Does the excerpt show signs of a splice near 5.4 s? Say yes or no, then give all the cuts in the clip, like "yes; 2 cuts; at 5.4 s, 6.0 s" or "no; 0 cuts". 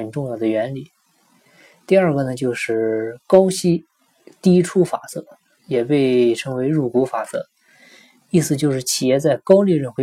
no; 0 cuts